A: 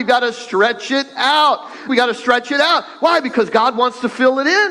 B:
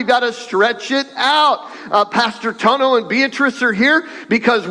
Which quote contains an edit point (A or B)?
A